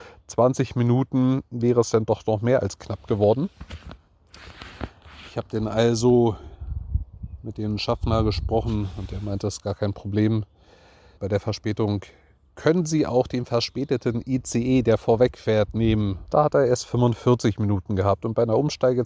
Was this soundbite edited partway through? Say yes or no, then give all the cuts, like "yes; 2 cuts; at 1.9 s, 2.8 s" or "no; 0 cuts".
yes; 2 cuts; at 11.2 s, 16.3 s